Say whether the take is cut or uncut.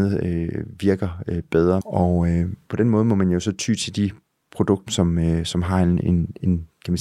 cut